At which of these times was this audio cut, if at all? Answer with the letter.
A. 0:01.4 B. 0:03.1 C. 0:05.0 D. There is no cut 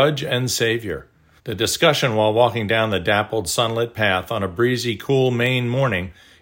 A